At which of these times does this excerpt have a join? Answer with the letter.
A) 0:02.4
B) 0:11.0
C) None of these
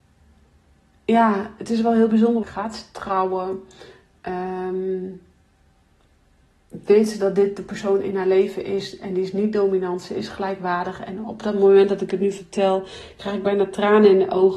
A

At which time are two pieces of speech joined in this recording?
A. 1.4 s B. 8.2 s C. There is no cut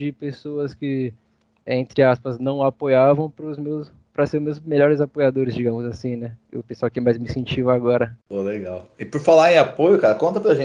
B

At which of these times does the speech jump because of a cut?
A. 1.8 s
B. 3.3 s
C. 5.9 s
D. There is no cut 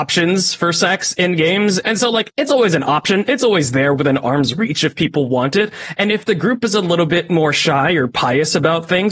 A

